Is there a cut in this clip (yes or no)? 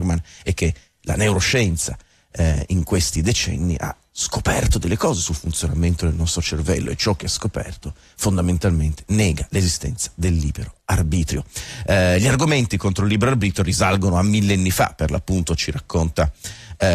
no